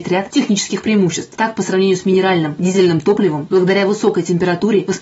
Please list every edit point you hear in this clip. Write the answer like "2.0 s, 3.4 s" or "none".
3.5 s